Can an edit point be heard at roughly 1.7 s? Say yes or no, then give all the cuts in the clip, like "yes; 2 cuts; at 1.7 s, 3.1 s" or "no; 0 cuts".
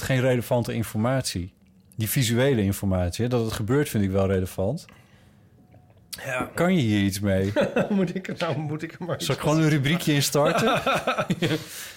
no; 1 cut; at 6.5 s